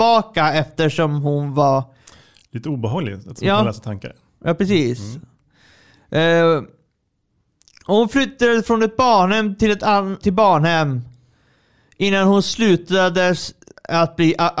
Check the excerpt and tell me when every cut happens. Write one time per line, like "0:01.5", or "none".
0:10.2